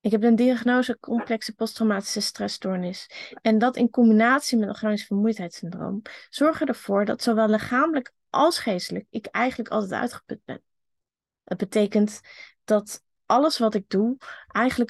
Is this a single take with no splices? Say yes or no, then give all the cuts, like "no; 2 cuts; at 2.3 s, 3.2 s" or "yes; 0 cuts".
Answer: yes; 0 cuts